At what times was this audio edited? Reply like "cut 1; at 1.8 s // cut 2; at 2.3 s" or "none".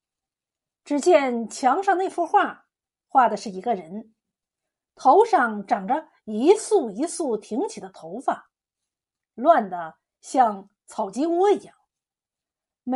none